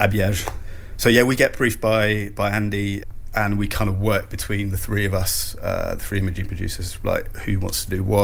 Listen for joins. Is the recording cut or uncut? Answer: uncut